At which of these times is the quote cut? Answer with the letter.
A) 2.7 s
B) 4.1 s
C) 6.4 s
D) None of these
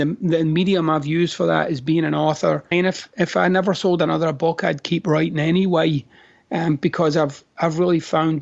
A